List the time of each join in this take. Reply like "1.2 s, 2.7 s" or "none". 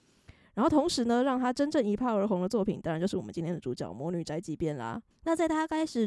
5.1 s